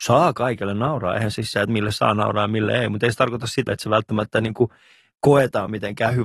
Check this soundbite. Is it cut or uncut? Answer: cut